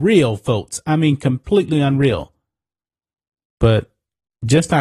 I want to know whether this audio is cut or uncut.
cut